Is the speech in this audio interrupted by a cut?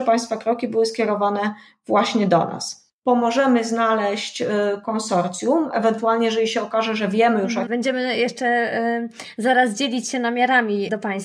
yes; 2 cuts; at 2.9 s, 7.7 s

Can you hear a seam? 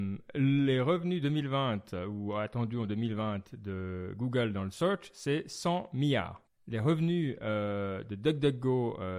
yes; 1 cut; at 6.4 s

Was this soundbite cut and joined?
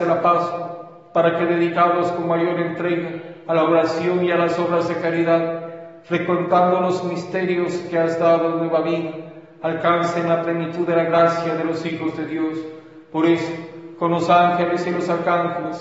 no; 0 cuts

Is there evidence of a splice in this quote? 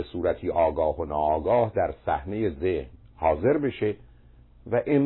no; 0 cuts

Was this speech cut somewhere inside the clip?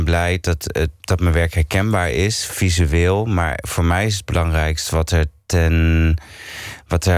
no; 0 cuts

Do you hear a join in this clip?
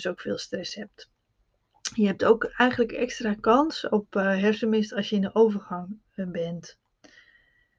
no; 0 cuts

